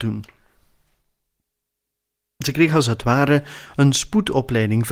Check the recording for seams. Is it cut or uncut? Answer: uncut